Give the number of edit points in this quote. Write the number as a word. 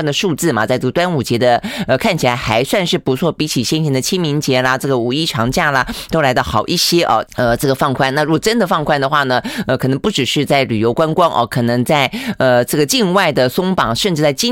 one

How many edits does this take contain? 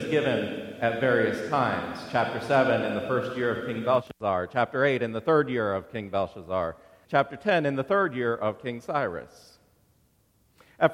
one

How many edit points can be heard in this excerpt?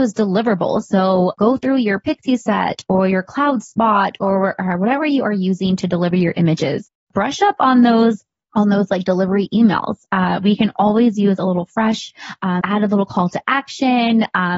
one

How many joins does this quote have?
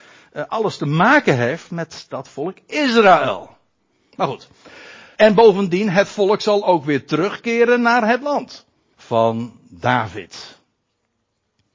two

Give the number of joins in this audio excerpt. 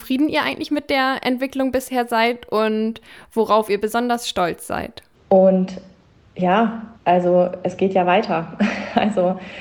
two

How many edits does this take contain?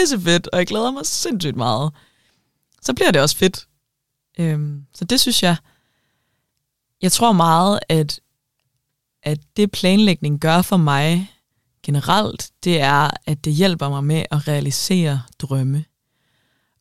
zero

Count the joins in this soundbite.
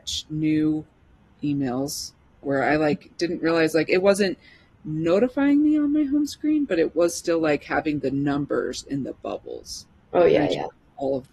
one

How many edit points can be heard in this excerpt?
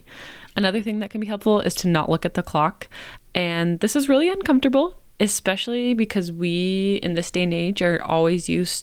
one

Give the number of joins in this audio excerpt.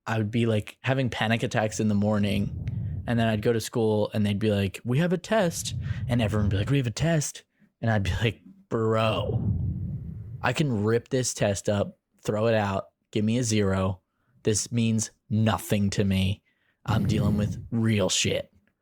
one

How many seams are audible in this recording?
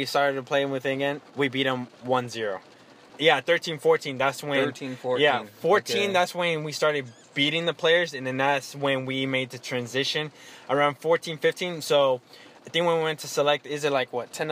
one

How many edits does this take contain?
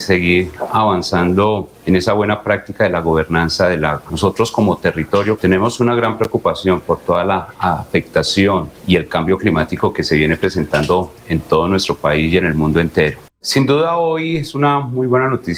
two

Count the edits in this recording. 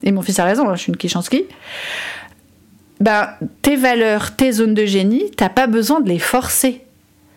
one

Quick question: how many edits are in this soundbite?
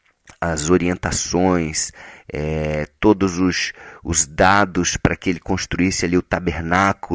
zero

